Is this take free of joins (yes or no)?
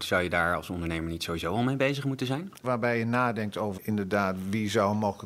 no